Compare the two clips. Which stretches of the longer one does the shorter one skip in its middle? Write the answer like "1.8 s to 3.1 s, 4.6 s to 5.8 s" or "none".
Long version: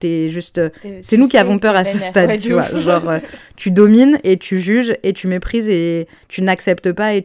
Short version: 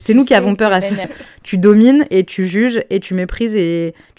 2.1 s to 3.2 s